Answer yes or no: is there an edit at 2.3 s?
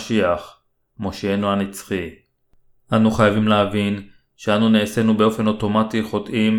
no